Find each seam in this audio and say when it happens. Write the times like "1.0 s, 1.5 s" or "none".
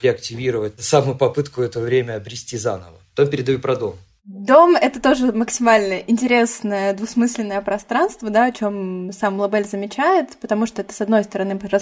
none